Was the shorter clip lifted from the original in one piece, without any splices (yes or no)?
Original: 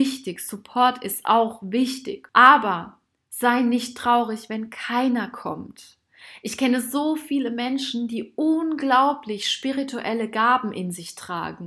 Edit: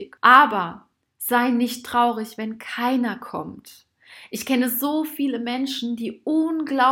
yes